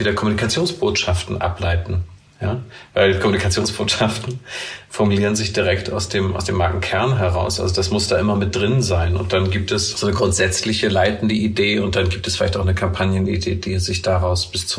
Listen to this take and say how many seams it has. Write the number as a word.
one